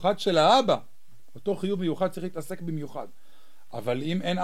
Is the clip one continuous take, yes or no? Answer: yes